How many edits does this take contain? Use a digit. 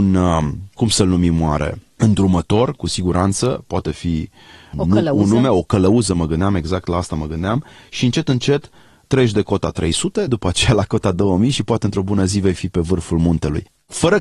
1